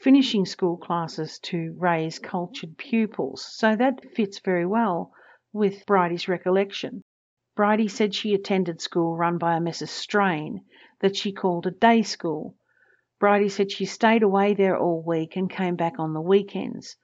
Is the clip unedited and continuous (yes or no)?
no